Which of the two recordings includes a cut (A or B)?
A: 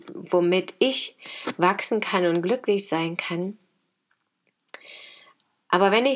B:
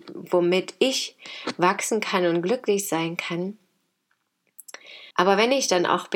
B